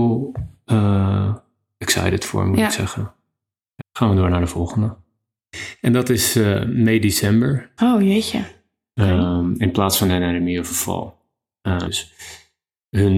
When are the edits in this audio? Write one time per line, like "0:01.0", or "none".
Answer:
0:03.8
0:07.8
0:11.9